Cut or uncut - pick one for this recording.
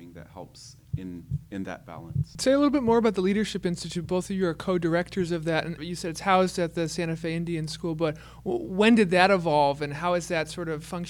cut